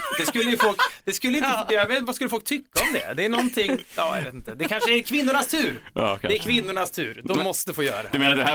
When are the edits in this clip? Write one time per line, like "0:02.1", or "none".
none